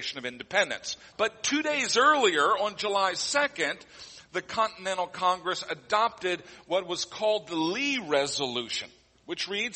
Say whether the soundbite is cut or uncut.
cut